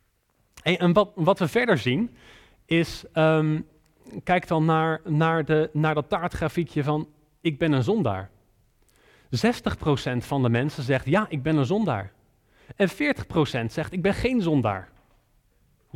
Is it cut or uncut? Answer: uncut